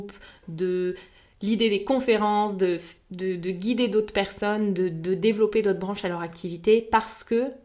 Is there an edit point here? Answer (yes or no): no